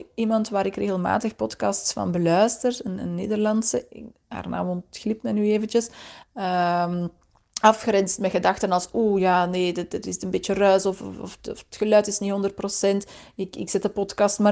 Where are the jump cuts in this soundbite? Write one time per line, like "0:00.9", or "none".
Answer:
0:06.2